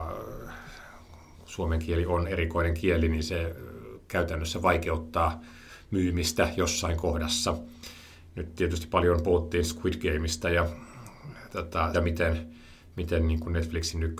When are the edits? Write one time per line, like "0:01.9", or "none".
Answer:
0:11.9